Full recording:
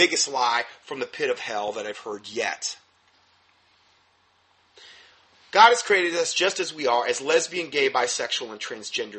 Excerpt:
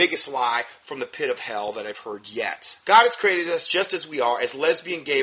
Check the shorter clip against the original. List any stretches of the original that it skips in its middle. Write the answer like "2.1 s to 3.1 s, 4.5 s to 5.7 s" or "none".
2.8 s to 5.5 s